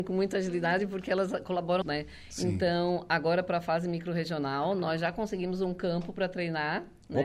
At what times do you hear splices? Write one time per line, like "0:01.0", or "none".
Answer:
0:01.8